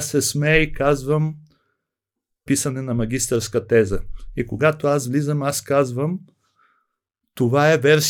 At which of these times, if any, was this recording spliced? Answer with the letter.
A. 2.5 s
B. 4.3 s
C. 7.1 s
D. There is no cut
A